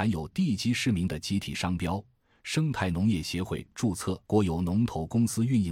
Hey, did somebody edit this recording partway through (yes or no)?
yes